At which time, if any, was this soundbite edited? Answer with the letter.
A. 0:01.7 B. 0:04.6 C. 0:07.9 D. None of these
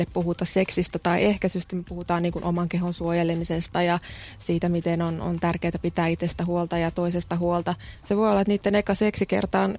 C